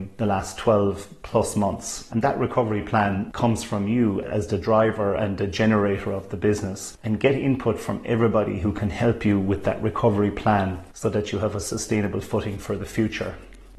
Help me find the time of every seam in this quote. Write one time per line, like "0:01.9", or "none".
0:02.1